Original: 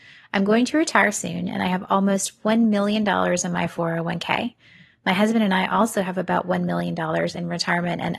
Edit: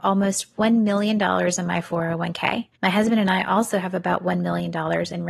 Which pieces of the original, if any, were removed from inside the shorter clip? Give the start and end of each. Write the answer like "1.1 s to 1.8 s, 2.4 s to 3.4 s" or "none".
4.6 s to 5.0 s